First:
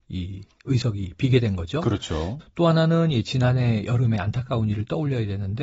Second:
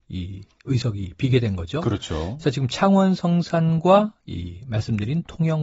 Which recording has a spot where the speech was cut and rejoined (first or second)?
first